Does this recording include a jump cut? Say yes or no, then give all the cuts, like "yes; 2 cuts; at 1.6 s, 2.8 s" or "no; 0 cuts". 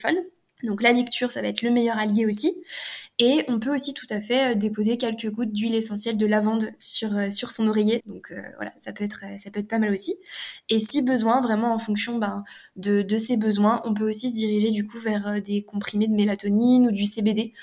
yes; 1 cut; at 8.0 s